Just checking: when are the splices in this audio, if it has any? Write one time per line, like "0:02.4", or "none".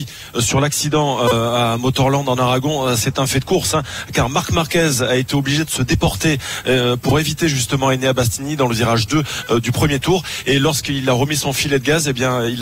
none